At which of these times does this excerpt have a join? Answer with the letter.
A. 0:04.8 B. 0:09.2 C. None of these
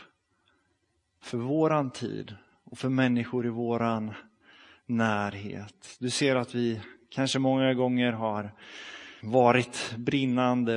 B